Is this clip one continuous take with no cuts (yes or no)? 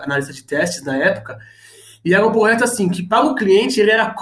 yes